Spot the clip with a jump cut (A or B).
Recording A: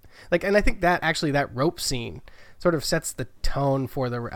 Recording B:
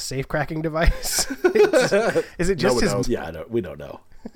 B